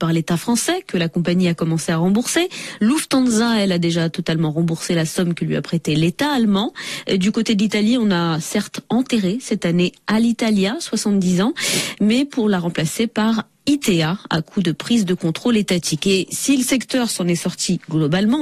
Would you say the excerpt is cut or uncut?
uncut